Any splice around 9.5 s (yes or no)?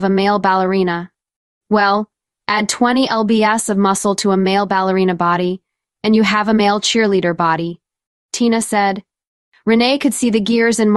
no